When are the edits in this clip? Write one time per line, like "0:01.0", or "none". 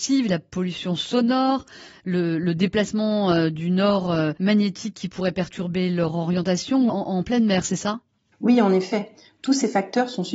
0:06.9